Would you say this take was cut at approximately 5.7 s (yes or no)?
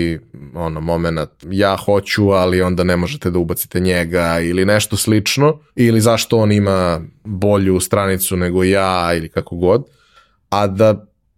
yes